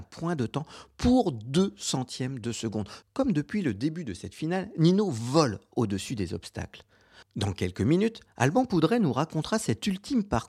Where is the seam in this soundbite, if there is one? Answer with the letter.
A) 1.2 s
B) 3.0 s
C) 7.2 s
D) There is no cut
B